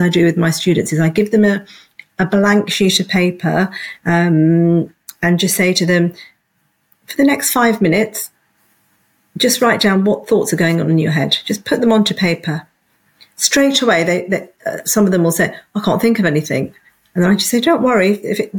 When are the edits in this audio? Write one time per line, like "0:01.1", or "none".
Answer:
none